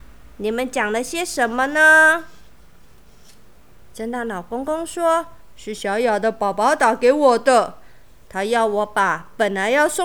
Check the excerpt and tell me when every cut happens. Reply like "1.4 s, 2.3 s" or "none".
none

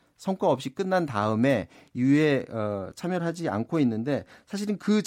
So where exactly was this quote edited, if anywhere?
none

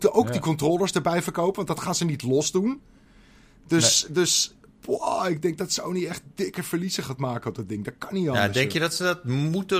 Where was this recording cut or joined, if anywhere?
none

